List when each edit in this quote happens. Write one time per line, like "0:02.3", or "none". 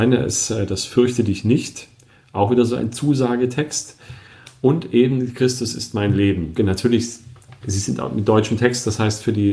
0:06.6